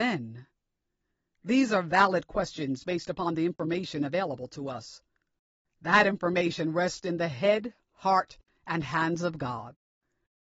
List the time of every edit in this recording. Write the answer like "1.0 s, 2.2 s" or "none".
5.6 s